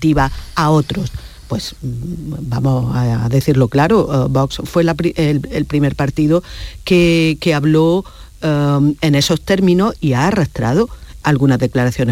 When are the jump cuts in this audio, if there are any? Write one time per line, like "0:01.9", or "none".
0:11.2

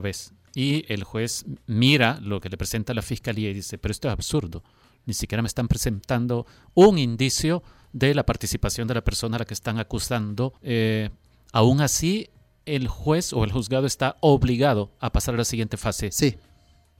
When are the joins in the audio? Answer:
0:10.6

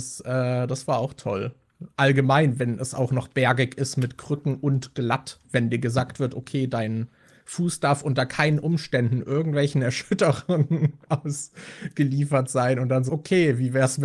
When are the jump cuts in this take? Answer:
0:05.4
0:13.1

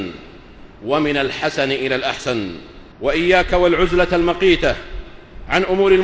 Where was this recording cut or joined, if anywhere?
0:02.9

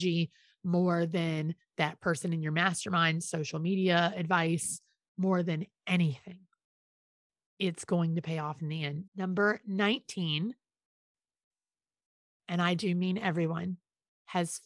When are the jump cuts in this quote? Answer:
0:09.1
0:12.4

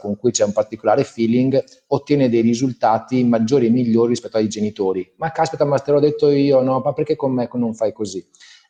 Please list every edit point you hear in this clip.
none

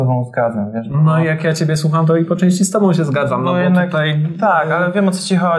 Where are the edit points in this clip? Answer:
none

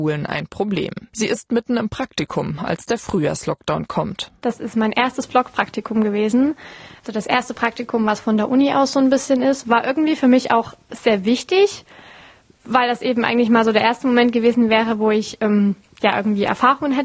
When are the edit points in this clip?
0:01.1

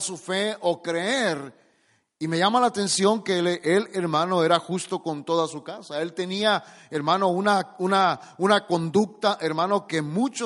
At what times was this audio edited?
none

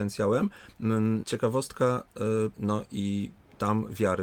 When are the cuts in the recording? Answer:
0:01.2
0:02.5

